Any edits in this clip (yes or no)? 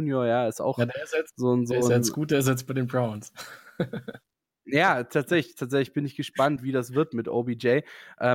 no